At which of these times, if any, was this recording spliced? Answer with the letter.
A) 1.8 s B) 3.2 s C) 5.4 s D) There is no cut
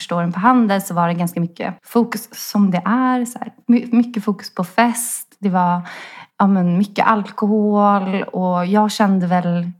A